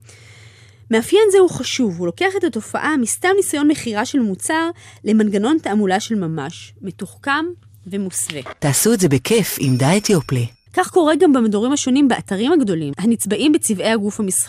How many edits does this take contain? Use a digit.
3